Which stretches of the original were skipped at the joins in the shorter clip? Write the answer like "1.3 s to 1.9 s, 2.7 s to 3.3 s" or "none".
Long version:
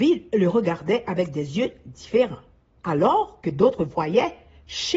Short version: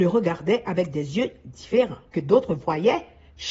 2.5 s to 3.4 s

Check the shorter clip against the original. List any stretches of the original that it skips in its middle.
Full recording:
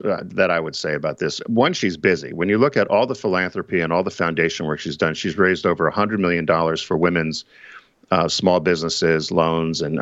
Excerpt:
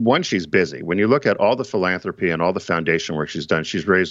none

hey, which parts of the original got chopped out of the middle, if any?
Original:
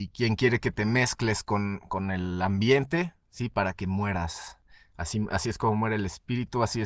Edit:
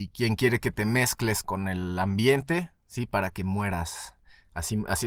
1.4 s to 1.9 s

